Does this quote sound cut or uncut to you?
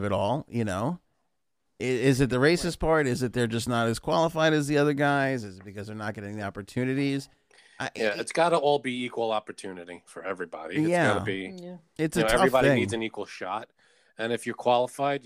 uncut